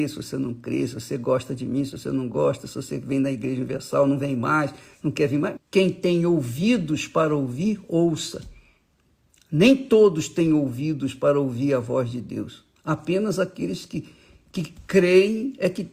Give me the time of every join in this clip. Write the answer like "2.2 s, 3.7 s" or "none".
5.6 s